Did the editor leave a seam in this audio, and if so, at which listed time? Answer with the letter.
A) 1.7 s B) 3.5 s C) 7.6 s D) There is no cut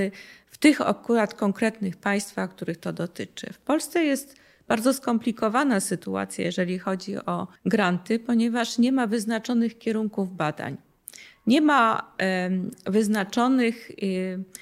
C